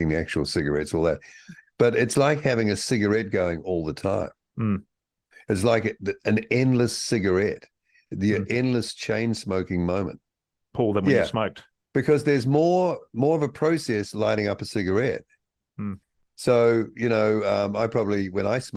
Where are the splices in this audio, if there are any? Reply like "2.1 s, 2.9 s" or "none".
10.6 s

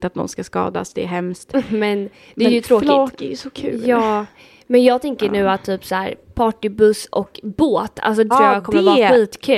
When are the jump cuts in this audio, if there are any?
8.3 s

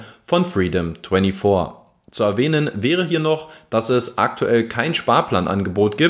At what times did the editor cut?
none

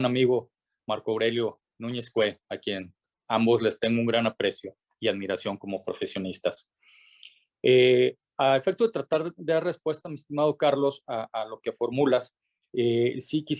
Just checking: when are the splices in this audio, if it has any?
none

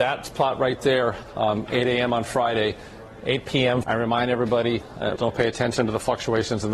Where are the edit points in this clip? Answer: 3.8 s, 5.2 s

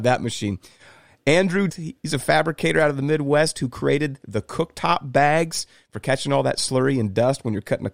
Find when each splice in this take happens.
1.7 s

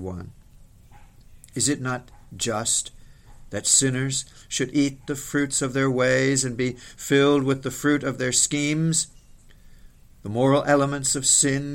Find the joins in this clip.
4.4 s

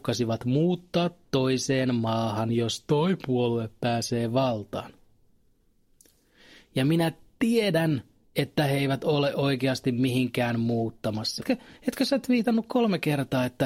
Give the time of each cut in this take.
11.4 s

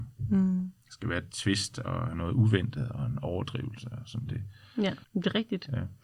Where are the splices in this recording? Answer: 5.0 s

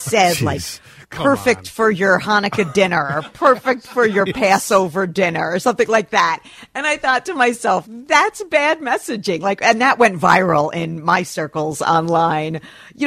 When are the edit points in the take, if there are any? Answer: 7.8 s

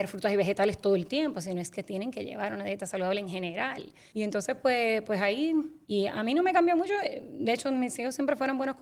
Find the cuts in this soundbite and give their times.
4.1 s, 5.8 s

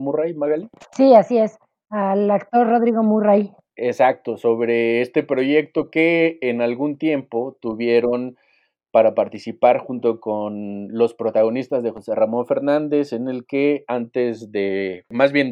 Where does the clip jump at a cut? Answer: none

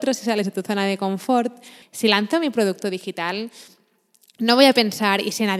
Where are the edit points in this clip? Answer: 1.8 s

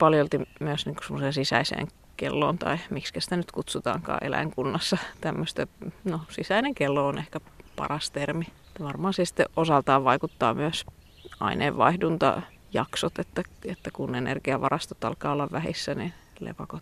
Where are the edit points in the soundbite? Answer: 6.0 s

